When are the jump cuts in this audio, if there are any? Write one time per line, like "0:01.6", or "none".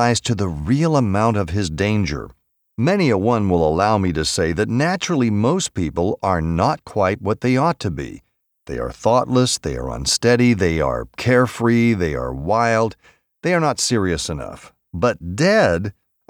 none